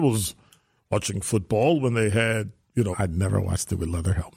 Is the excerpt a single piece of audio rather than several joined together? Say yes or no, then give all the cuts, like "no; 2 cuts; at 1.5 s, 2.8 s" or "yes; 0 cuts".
no; 1 cut; at 2.9 s